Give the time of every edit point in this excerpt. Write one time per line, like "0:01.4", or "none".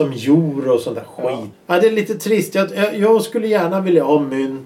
0:01.5

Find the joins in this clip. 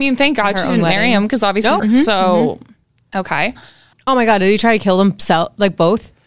0:01.8
0:03.9

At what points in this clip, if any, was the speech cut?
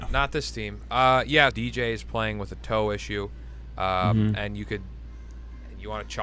0:01.5

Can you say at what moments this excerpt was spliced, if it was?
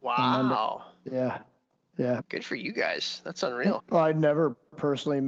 0:02.2
0:03.8

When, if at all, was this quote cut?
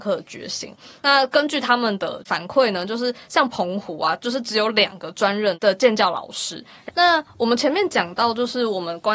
0:06.9

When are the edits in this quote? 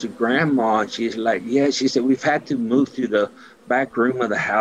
none

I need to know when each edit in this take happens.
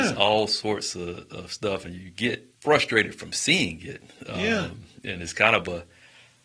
0:02.6

